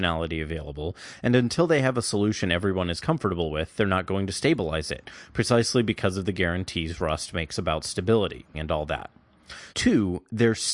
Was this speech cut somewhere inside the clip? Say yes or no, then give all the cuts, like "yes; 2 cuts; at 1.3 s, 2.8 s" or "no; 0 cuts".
yes; 2 cuts; at 8.5 s, 9.7 s